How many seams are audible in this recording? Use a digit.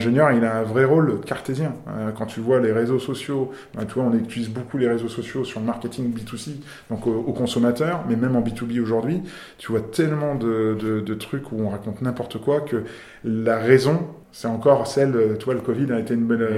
1